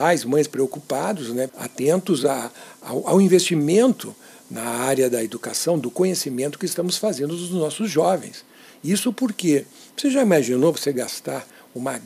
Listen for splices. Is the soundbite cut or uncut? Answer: cut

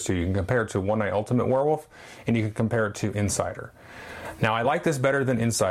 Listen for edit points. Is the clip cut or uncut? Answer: uncut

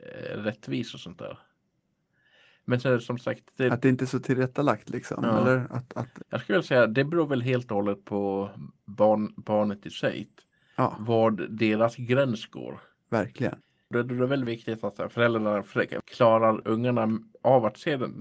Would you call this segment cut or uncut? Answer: cut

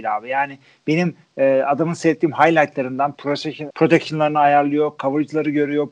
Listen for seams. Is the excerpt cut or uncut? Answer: cut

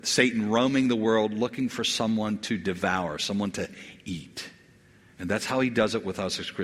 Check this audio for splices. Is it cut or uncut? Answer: uncut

